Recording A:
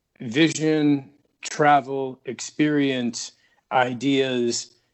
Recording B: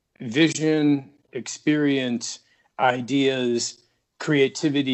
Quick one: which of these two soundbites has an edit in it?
B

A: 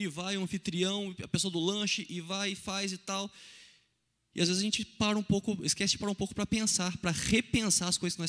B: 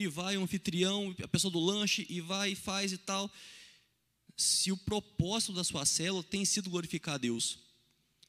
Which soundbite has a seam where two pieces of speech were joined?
B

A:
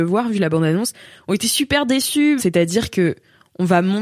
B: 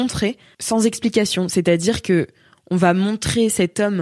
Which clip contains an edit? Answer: A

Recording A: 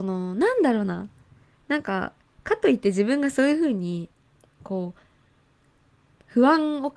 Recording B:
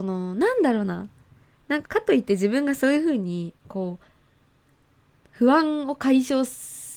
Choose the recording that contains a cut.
B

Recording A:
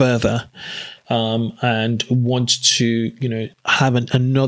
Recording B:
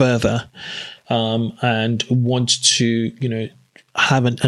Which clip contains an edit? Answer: A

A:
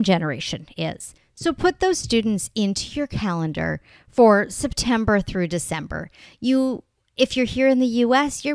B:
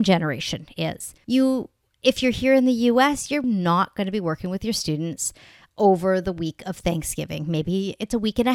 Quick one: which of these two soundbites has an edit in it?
B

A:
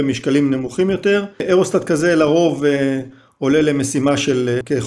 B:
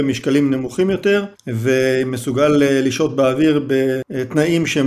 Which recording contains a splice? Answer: B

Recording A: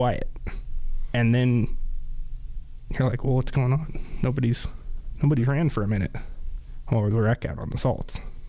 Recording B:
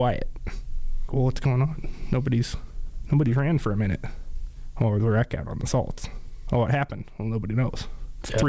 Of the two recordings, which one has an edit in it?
B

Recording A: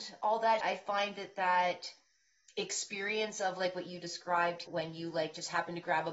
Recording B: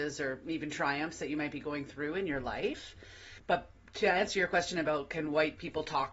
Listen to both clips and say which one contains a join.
A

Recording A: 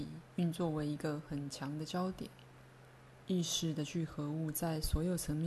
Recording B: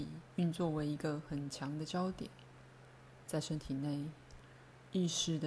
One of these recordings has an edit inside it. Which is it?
A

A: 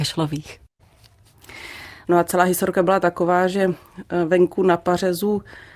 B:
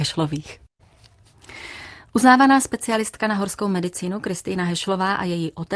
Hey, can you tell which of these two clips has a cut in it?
A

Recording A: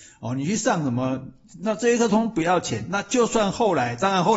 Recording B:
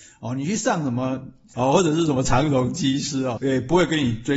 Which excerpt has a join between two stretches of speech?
B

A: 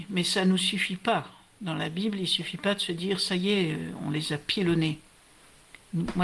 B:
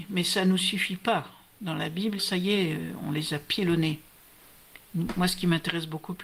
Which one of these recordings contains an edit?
B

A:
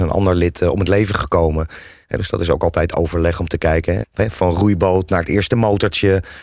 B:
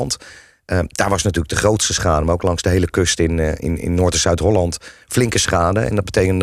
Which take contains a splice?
A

